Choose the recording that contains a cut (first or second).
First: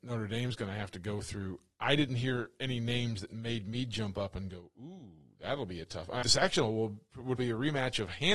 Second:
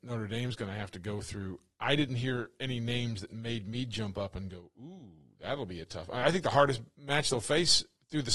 first